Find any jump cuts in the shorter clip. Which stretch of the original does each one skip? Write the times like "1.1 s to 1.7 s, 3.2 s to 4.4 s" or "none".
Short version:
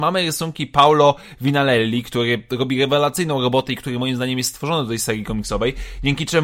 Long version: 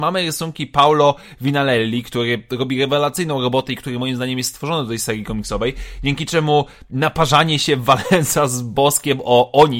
none